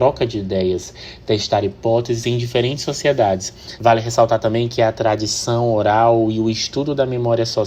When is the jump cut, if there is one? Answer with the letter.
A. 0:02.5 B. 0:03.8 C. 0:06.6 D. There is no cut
B